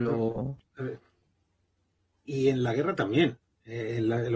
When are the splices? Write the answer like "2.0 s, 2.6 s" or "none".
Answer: 2.1 s